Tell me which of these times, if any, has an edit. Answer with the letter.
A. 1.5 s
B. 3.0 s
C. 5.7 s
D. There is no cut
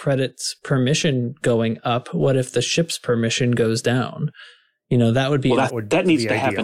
C